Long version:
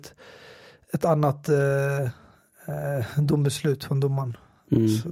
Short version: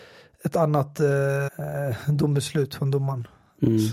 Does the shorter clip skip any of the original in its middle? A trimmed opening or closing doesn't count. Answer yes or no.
yes